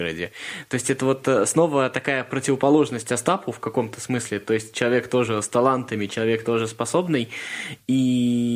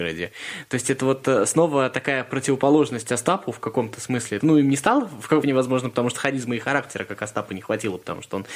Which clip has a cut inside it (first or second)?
second